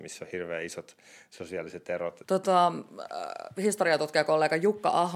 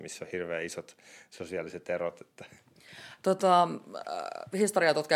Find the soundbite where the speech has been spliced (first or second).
first